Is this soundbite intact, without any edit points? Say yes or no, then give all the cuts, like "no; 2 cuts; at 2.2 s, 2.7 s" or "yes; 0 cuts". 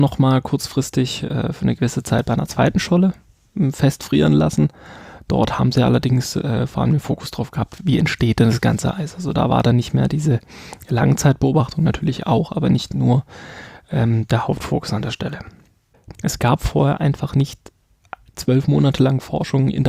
no; 1 cut; at 16.1 s